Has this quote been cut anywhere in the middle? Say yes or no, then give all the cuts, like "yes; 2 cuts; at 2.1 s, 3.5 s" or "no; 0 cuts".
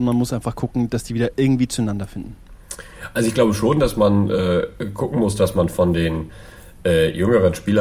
no; 0 cuts